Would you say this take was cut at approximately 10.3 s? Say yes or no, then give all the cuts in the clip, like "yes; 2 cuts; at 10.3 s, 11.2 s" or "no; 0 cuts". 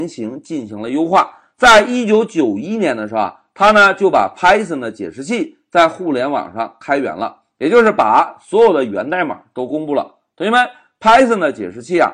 no; 0 cuts